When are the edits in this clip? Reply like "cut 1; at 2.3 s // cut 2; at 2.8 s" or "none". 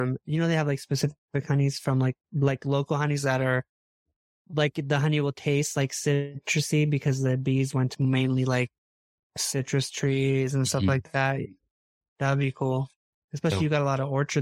cut 1; at 7.9 s